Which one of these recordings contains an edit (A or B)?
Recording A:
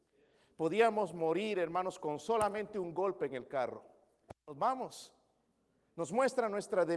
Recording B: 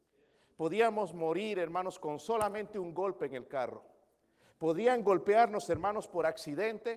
A